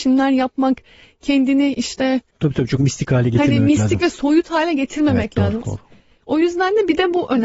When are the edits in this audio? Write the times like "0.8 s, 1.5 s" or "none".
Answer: 5.6 s